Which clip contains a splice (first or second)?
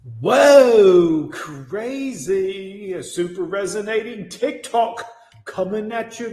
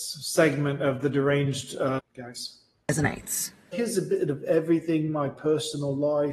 second